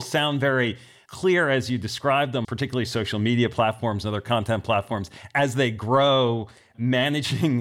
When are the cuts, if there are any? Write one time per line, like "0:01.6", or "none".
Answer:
0:02.4